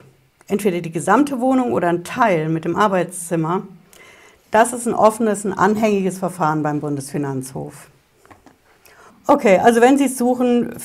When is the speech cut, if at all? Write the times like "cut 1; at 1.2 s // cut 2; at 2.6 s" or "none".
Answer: cut 1; at 9.1 s